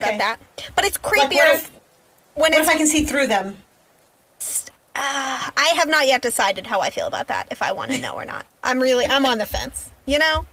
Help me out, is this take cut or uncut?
cut